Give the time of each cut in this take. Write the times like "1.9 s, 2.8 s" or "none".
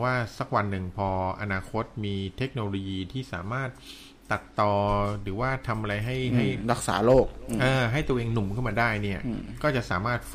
none